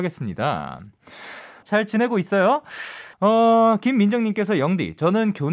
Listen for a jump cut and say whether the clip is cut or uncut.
cut